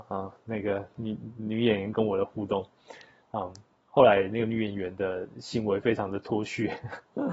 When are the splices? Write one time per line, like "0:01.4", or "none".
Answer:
none